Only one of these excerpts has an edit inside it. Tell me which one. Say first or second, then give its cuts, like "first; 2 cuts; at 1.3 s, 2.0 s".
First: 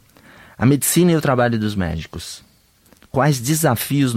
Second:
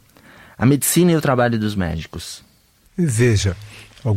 second; 1 cut; at 2.8 s